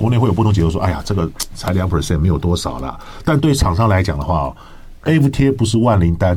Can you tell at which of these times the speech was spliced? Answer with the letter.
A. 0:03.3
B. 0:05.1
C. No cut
B